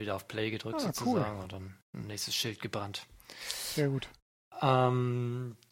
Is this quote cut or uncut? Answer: uncut